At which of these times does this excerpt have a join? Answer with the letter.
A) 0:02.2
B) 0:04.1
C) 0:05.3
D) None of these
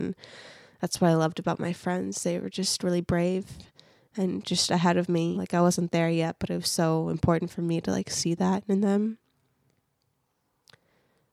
C